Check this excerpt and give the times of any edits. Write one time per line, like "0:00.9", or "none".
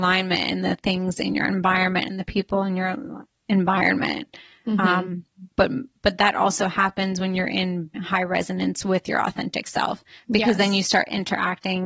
0:05.5
0:07.9